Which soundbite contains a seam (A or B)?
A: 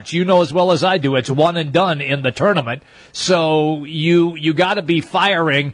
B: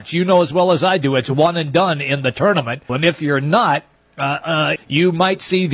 B